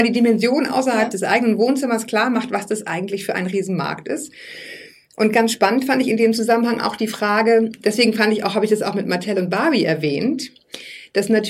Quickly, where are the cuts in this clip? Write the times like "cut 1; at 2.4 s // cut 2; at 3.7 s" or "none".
cut 1; at 7.8 s